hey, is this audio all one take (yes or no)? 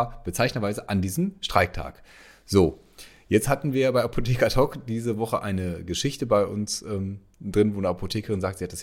yes